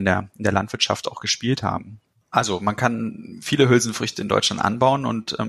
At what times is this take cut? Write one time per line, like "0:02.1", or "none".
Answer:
0:02.2